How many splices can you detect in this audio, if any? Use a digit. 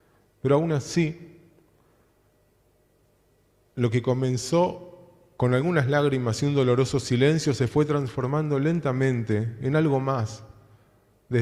0